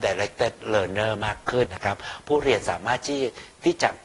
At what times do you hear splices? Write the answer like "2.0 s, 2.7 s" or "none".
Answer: 1.7 s